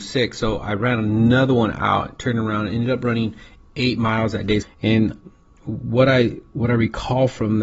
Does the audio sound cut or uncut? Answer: cut